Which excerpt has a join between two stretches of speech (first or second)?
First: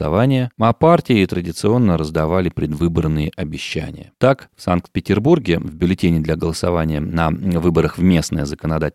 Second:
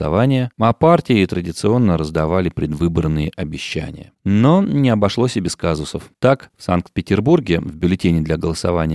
first